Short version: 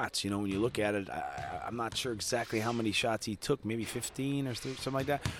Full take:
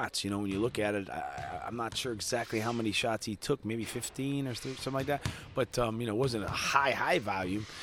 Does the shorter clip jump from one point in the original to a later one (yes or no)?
no